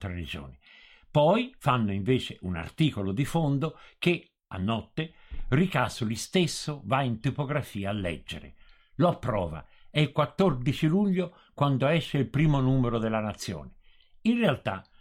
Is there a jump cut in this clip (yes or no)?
no